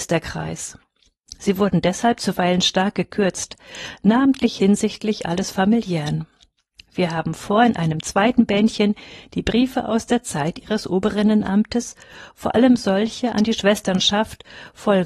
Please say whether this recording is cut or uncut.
uncut